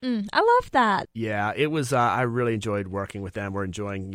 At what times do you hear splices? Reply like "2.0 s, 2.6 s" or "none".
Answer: 1.0 s

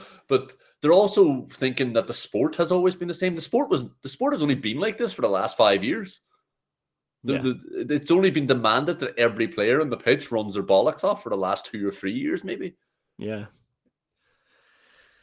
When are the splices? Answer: none

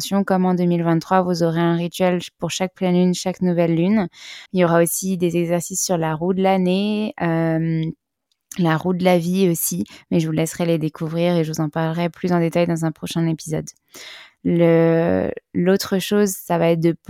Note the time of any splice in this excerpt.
4.5 s, 14.3 s

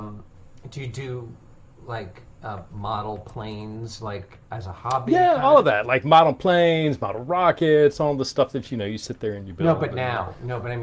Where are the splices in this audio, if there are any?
none

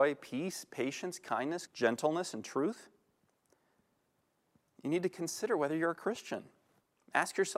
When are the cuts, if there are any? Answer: 1.7 s

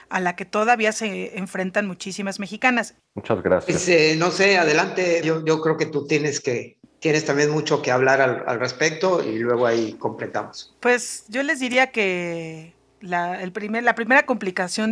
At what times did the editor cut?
3.0 s, 5.2 s

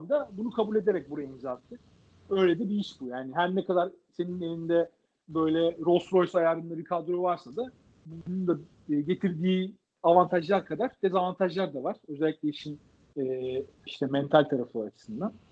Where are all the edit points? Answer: 13.9 s

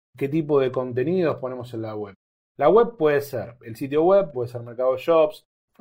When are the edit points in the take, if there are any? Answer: 4.3 s

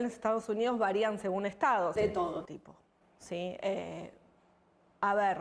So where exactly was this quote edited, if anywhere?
2.0 s

